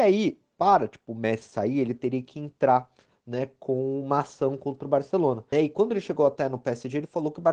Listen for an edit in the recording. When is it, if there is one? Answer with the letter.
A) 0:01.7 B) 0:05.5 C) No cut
B